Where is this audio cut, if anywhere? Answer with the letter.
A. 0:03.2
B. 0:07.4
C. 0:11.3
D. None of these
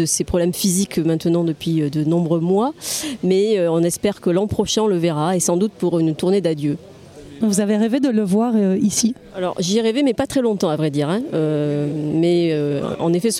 B